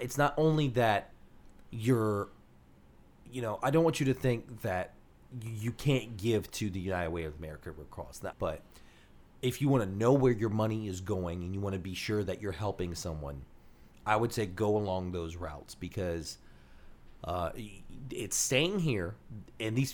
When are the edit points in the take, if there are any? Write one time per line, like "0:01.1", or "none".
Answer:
0:08.3